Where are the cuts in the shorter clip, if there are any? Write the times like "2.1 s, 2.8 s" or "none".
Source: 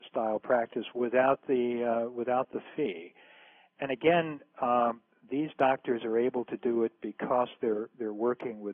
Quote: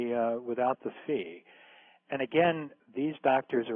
2.8 s